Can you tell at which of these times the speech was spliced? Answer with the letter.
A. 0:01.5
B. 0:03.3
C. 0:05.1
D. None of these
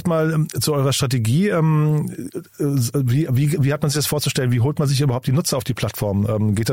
D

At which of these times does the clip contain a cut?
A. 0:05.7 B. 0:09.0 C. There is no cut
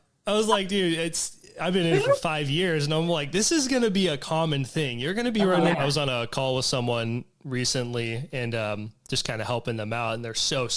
A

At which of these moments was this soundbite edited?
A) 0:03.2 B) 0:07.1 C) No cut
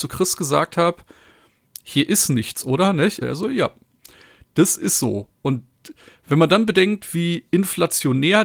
A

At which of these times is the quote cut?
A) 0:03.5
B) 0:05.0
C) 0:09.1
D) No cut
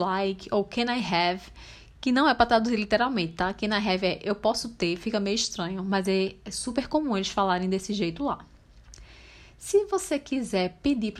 D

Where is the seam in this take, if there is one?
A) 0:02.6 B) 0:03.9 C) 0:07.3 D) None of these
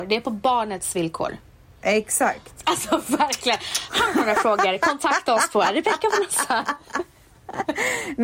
A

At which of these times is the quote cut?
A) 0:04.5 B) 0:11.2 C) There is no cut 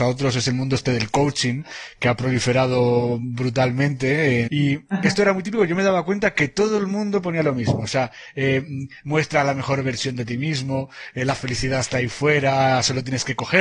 A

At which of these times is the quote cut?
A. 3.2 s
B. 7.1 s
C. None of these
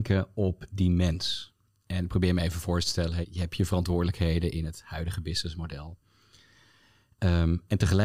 A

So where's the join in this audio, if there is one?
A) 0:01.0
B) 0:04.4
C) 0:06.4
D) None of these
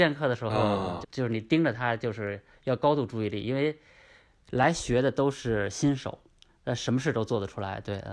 A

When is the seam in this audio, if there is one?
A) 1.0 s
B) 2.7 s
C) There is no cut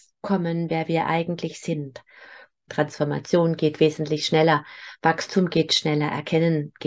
B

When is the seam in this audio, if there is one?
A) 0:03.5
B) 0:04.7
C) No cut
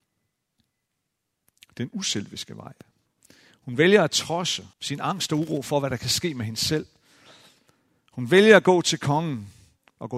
B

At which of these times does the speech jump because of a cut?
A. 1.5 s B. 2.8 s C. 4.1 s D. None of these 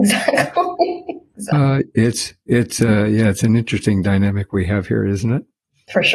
D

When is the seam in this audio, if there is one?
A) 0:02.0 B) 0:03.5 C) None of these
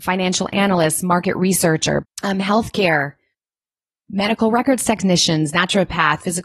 A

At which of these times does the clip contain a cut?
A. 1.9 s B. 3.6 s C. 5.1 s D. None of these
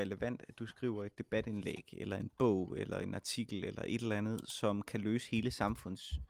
D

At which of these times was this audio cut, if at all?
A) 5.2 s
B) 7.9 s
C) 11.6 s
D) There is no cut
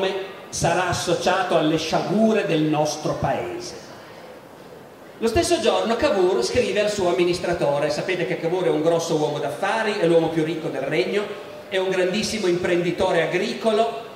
D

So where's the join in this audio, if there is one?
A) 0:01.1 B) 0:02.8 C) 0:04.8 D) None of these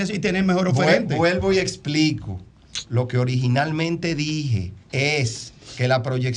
C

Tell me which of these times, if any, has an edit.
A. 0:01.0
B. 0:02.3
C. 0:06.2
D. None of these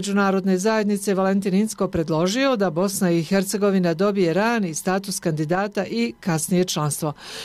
D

